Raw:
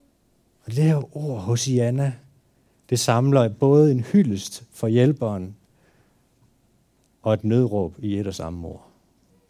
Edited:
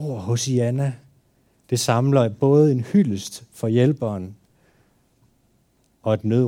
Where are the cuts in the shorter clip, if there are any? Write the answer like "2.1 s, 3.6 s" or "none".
none